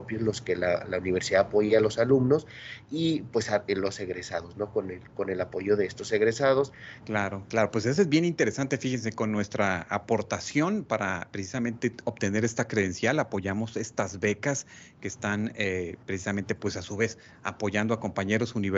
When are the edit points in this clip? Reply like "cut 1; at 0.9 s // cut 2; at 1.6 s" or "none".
cut 1; at 7.0 s